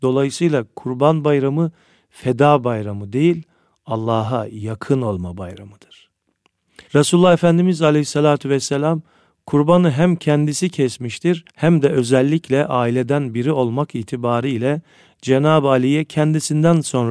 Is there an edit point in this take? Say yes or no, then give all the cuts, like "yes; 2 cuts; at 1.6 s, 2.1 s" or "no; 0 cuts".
yes; 2 cuts; at 6.9 s, 11.5 s